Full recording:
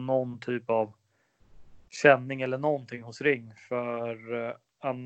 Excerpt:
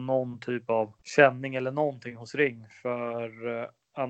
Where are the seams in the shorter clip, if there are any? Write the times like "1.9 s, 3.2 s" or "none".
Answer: 1.0 s